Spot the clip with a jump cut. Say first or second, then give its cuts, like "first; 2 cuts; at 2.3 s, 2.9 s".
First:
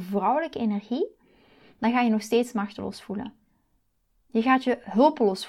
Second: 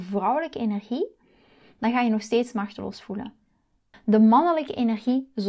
second; 1 cut; at 3.9 s